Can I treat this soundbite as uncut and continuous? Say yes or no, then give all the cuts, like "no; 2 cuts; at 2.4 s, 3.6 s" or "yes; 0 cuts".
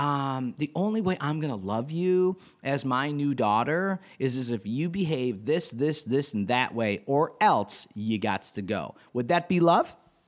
yes; 0 cuts